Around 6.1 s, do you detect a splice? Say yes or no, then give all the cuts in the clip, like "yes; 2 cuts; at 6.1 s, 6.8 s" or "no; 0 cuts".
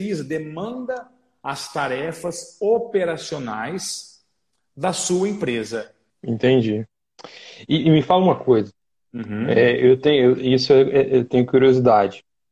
yes; 1 cut; at 6.1 s